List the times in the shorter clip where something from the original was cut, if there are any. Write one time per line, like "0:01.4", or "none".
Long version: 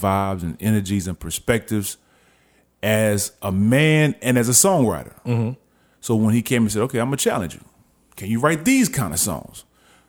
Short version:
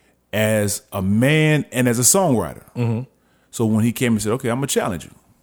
none